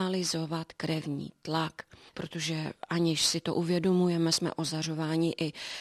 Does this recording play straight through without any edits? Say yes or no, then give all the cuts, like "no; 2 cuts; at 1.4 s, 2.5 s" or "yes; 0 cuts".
no; 1 cut; at 2.1 s